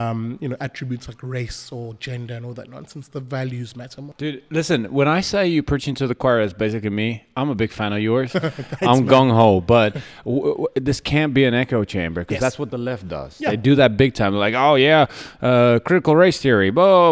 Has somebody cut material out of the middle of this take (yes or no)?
no